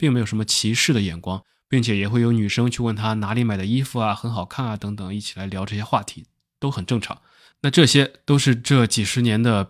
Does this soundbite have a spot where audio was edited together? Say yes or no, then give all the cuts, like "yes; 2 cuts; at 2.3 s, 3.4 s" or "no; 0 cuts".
no; 0 cuts